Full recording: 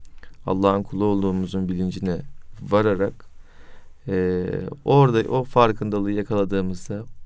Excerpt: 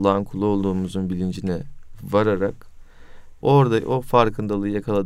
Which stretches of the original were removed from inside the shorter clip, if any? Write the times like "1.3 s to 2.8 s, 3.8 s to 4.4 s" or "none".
4.0 s to 4.8 s